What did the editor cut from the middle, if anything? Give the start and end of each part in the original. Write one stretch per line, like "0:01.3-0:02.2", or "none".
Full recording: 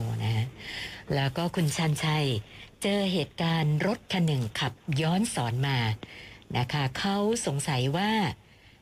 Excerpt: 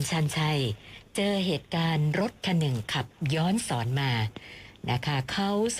none